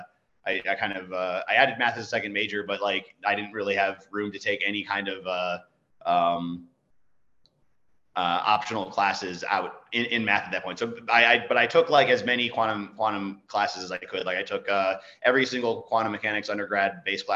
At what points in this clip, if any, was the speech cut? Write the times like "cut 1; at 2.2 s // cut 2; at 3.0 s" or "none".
none

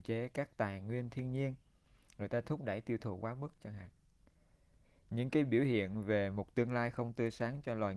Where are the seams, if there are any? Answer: none

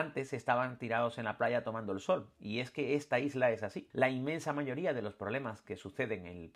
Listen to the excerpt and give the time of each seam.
cut 1; at 3.9 s

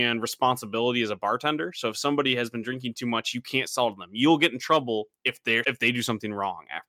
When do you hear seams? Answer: cut 1; at 5.6 s

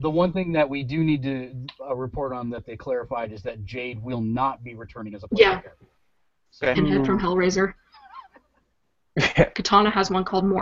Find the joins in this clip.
cut 1; at 6.7 s // cut 2; at 9.5 s

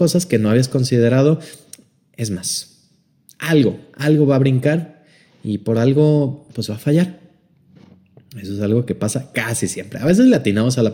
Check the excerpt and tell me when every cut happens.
none

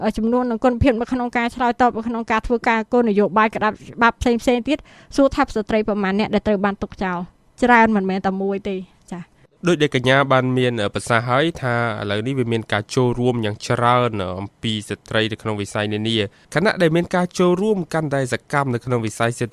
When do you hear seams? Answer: none

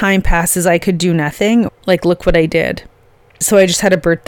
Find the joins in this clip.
cut 1; at 1.7 s

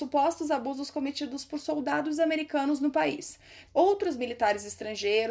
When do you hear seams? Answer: cut 1; at 3.7 s

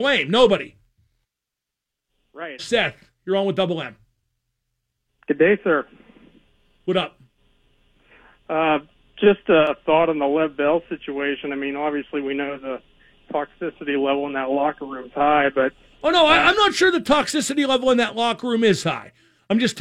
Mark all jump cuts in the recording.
cut 1; at 2.6 s

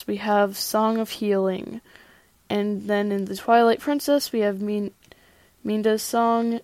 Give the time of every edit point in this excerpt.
none

